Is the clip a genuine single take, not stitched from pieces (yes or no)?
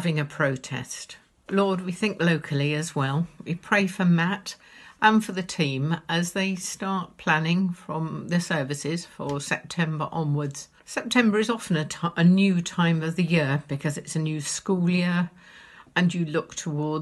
no